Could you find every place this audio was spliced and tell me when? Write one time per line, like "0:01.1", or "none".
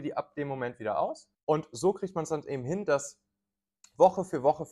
0:01.3